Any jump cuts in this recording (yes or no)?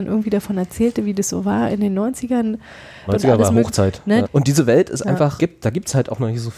yes